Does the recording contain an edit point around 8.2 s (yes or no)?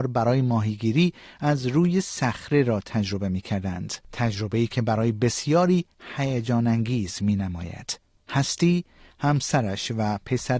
yes